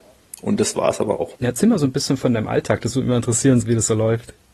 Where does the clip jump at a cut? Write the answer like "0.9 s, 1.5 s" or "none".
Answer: 1.4 s, 3.6 s